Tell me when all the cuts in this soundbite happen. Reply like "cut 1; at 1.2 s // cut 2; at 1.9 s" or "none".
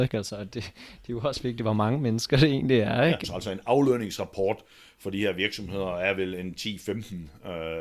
cut 1; at 3.2 s

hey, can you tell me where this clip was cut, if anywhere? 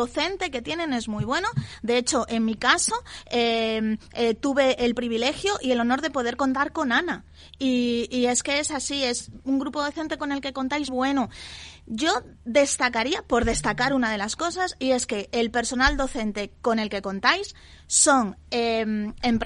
cut 1; at 10.9 s

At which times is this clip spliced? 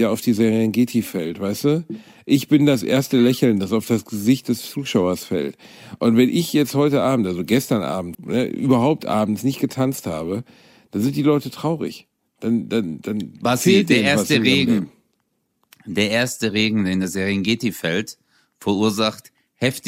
cut 1; at 8.1 s

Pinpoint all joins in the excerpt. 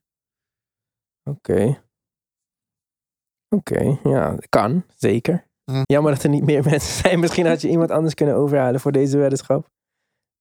cut 1; at 5.8 s

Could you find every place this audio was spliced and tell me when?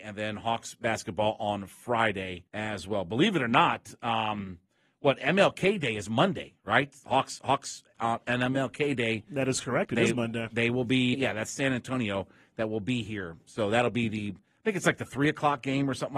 cut 1; at 2.5 s // cut 2; at 11.1 s

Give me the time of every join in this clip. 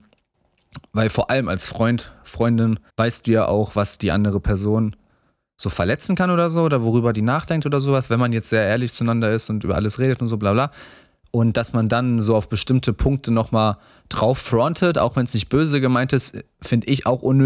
cut 1; at 2.9 s

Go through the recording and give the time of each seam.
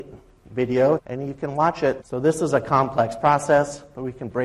cut 1; at 1.0 s // cut 2; at 2.0 s

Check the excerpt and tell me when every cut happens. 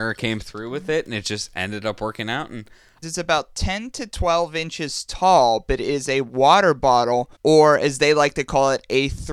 cut 1; at 3.0 s // cut 2; at 7.3 s

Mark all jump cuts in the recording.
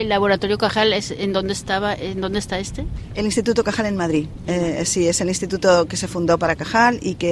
none

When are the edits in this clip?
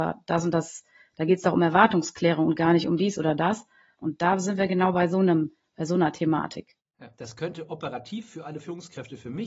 cut 1; at 3.9 s // cut 2; at 7.1 s

